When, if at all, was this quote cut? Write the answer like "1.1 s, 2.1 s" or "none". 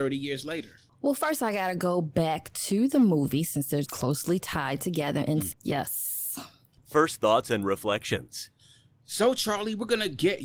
3.8 s, 5.5 s